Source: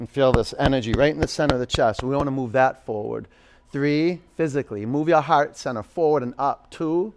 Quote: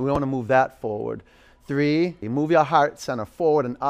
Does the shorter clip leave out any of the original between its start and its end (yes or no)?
yes